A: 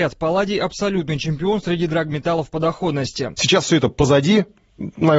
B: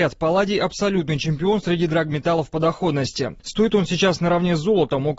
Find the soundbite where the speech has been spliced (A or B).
A